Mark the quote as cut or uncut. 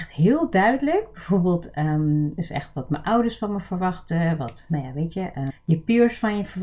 cut